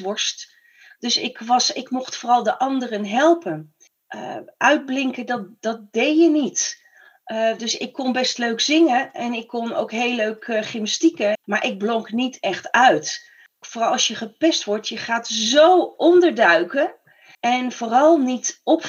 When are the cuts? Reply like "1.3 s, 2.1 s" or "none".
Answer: 11.3 s